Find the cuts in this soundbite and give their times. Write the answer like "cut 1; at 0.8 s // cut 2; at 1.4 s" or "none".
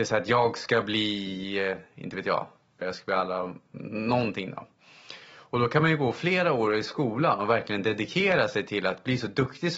cut 1; at 2.8 s